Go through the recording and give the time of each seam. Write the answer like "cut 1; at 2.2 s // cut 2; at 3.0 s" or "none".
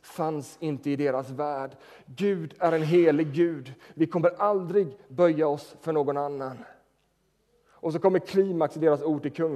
none